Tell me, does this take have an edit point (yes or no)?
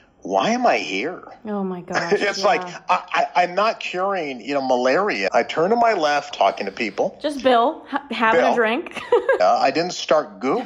yes